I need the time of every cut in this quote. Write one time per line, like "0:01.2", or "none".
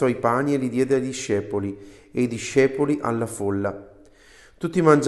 none